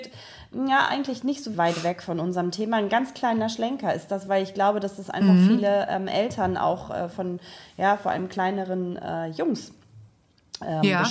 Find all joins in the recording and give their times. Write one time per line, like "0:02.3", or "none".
0:01.5